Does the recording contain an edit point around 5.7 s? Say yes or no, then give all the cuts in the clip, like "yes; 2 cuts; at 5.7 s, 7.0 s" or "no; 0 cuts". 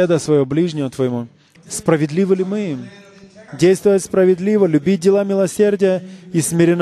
no; 2 cuts; at 1.6 s, 3.5 s